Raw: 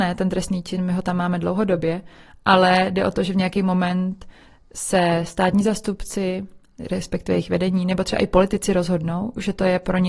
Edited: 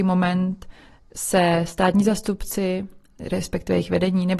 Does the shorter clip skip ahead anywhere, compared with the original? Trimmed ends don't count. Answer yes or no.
no